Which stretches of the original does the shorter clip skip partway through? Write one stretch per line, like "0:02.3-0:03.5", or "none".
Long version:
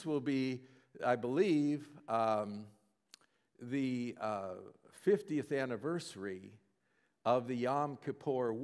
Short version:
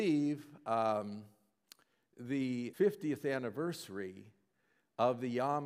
0:04.2-0:05.0